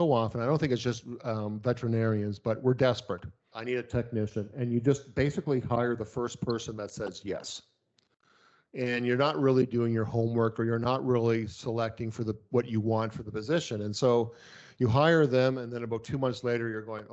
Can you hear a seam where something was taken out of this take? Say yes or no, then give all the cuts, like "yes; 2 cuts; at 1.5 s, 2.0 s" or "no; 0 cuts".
yes; 1 cut; at 3.5 s